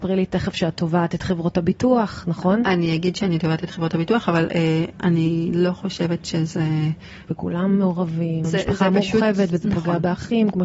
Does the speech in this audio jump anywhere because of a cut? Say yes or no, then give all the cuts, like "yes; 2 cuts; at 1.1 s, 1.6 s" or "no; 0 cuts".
yes; 2 cuts; at 7.3 s, 8.4 s